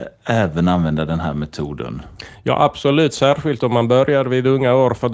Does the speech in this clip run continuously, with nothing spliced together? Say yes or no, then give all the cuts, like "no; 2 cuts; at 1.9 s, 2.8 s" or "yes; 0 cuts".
yes; 0 cuts